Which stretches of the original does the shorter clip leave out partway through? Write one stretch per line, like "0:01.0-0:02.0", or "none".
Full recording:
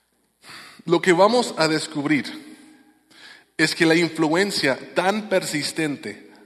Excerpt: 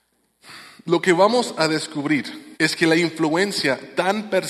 0:02.5-0:03.5